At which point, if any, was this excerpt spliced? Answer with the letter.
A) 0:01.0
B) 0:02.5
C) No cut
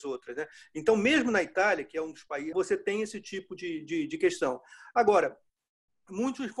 B